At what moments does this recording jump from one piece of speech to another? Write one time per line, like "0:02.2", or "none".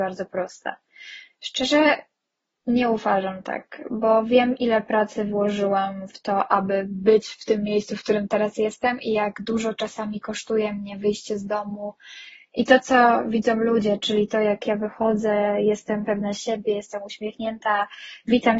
none

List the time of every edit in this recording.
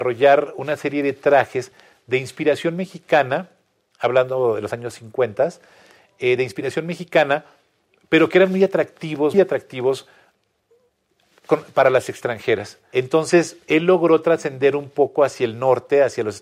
0:09.3
0:12.9

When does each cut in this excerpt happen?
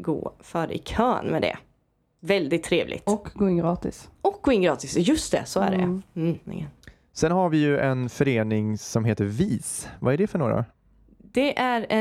none

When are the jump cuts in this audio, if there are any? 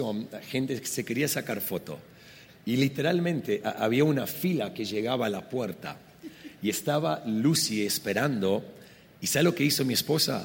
0:02.5

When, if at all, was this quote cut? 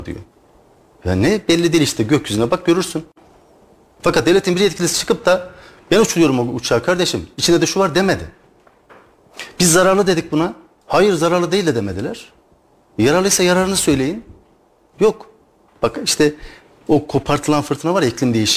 0:04.0

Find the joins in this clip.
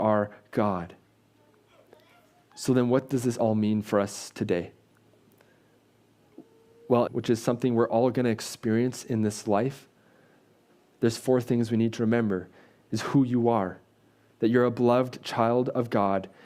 0:07.1

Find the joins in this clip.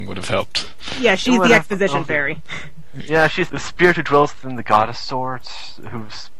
0:03.5

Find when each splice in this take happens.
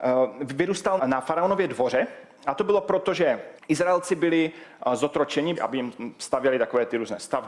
0:01.0
0:03.6
0:05.6

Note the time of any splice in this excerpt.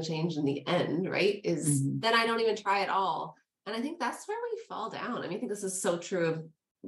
0:02.0

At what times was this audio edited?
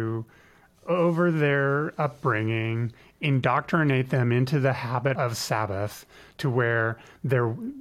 0:05.1

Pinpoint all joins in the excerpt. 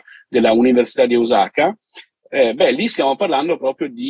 none

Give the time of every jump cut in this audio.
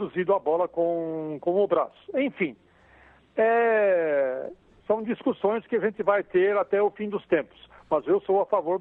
none

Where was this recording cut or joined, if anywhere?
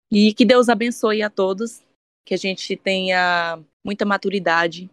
0:03.7

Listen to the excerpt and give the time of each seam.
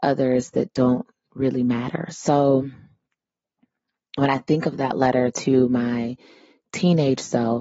none

